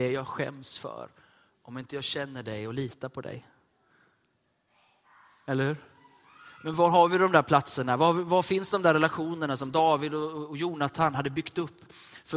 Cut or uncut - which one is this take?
uncut